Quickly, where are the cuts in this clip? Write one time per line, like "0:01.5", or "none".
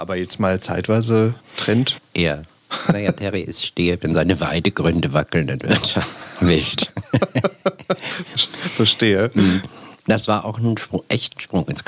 none